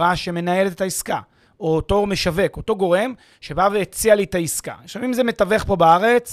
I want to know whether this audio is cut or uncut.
uncut